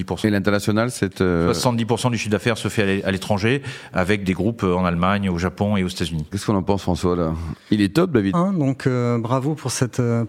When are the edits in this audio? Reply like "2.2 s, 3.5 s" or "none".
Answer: 6.3 s, 8.3 s